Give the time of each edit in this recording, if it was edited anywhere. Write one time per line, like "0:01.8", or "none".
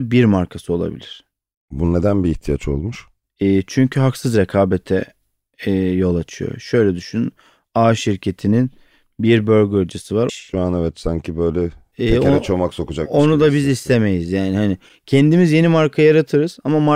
0:10.3